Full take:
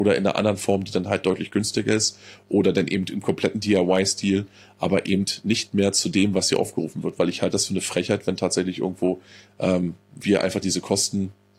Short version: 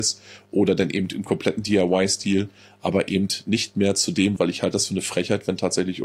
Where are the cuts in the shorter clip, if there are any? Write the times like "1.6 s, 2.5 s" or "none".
4.4 s